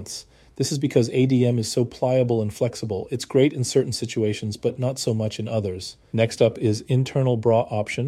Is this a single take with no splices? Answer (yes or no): no